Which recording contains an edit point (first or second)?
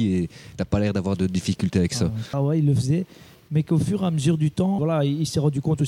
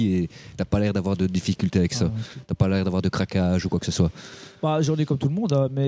first